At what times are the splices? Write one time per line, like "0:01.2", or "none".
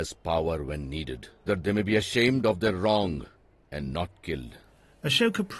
0:01.5